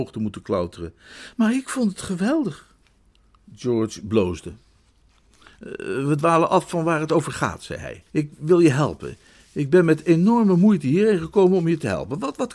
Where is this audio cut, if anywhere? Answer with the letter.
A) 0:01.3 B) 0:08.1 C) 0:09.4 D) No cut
B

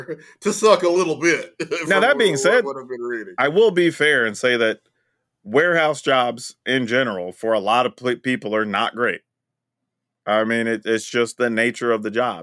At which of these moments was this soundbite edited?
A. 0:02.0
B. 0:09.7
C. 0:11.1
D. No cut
D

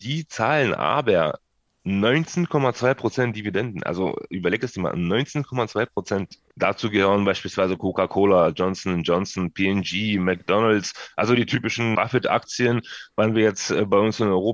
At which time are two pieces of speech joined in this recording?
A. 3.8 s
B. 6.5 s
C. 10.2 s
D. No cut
B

